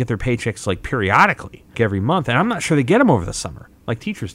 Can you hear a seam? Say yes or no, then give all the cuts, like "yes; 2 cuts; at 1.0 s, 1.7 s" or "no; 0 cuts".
yes; 1 cut; at 1.7 s